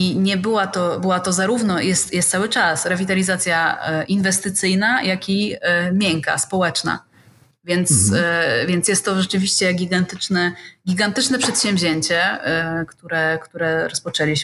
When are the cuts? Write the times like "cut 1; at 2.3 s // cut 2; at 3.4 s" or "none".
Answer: none